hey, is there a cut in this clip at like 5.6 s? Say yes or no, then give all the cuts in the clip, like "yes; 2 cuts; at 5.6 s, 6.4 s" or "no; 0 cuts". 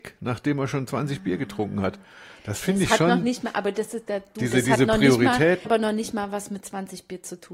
yes; 1 cut; at 5.6 s